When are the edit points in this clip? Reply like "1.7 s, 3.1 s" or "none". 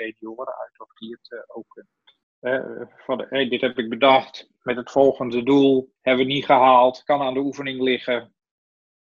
2.2 s, 6.0 s